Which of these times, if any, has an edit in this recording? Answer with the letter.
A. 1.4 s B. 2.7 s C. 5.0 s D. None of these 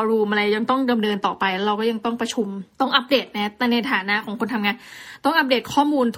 B